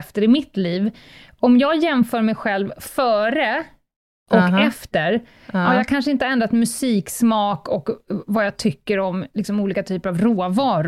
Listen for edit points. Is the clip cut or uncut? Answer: uncut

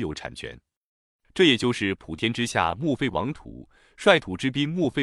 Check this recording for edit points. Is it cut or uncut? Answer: uncut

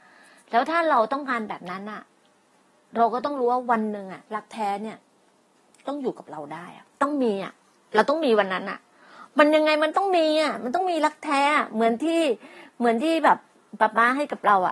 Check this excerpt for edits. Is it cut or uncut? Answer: cut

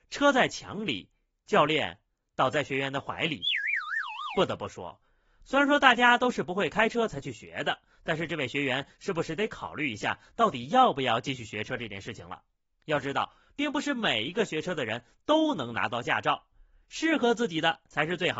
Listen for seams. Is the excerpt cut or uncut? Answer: uncut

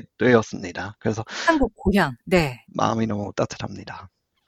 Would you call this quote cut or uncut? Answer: cut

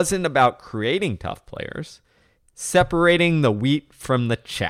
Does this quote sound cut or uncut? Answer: cut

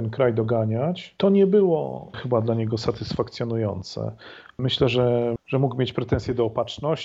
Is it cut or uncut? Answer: cut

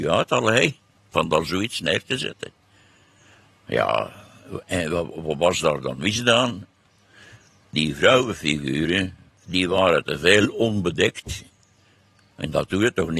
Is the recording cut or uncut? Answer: uncut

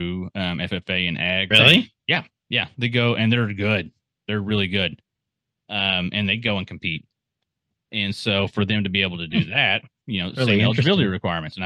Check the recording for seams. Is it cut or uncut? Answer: cut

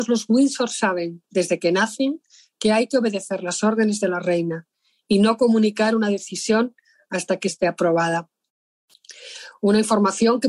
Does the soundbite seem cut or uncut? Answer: uncut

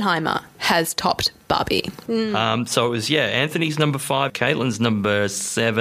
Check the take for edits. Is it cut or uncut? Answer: cut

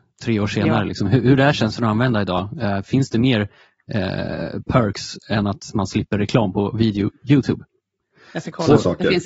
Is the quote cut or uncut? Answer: uncut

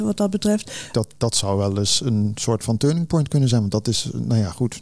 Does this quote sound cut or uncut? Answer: cut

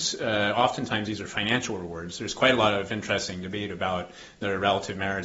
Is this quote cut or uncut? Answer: uncut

